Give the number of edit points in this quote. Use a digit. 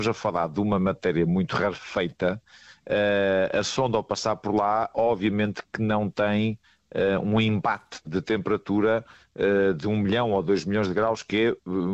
0